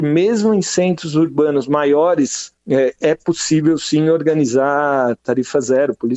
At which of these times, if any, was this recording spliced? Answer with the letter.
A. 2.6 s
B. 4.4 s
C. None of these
A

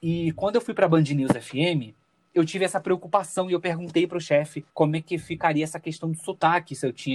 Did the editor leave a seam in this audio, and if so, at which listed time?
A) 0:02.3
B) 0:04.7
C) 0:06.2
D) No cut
B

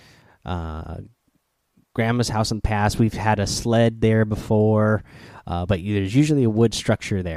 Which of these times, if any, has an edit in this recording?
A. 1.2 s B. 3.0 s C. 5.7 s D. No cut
D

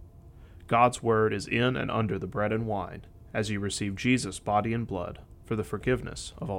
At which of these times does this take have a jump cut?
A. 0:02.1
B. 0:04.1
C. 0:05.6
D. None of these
D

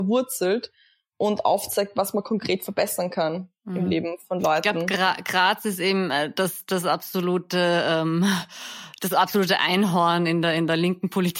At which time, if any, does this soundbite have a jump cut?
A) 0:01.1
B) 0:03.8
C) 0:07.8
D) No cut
D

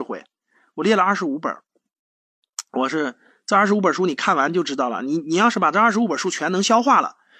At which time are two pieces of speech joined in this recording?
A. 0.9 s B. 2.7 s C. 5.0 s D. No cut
D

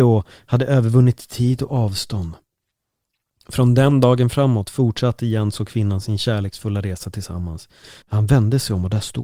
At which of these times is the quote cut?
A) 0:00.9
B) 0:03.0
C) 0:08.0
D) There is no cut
C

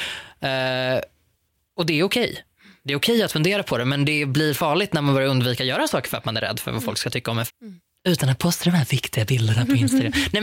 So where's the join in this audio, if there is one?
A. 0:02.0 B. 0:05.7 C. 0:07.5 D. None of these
C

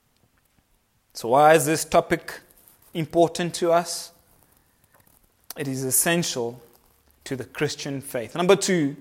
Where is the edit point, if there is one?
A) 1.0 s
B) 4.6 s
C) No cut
C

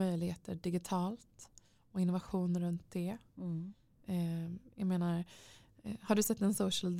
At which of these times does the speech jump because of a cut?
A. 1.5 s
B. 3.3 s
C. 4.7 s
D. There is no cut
C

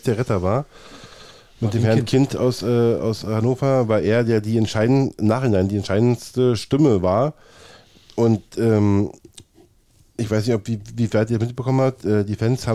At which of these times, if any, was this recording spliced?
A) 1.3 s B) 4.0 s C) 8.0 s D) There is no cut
D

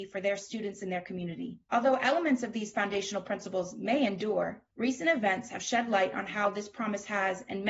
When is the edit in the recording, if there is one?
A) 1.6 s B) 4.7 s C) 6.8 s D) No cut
A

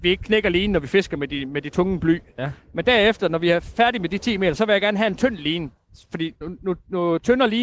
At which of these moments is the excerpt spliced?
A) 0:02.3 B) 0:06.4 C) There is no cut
B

